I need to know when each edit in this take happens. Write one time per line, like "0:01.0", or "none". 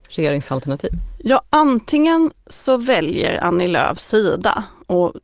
none